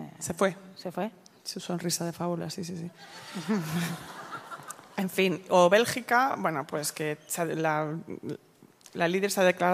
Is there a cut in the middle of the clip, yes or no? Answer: no